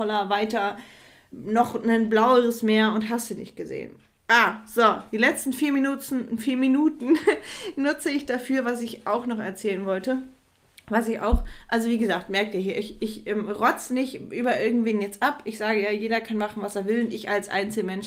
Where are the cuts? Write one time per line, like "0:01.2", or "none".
none

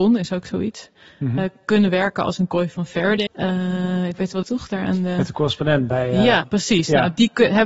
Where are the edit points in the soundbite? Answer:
0:03.3
0:04.4
0:06.4

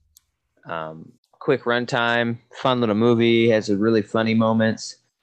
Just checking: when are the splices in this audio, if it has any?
0:01.2

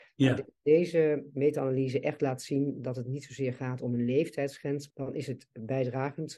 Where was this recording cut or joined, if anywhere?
0:01.3
0:04.9

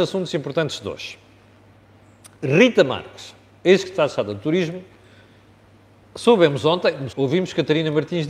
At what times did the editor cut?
0:07.1

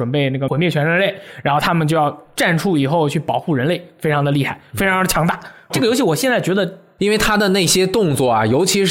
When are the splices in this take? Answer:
0:05.7
0:07.0

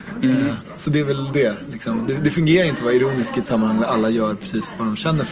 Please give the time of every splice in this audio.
none

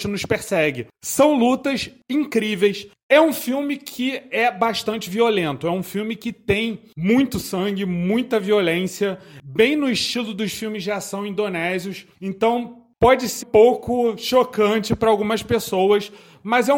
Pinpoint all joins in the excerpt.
0:13.4

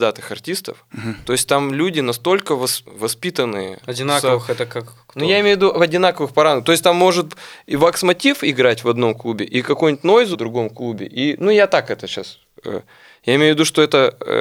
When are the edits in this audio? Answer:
0:02.8
0:10.3

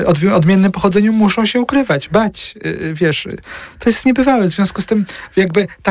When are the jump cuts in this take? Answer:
none

